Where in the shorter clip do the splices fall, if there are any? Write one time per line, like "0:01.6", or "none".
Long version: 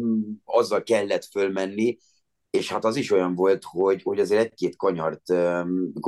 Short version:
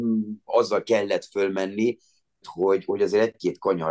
0:02.4